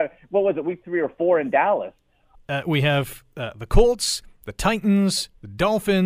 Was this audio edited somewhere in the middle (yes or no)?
yes